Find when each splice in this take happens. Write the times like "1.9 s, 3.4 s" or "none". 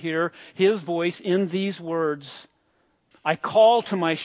3.1 s